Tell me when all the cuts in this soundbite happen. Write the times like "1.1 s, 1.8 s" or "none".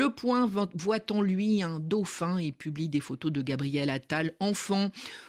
none